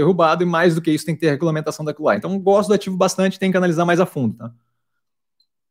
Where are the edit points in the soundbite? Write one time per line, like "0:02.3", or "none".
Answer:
0:02.2